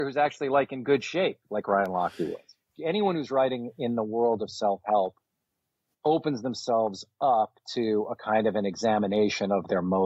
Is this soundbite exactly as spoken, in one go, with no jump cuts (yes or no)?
no